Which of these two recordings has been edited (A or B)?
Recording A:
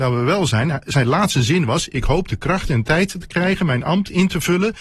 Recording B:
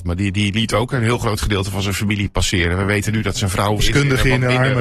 B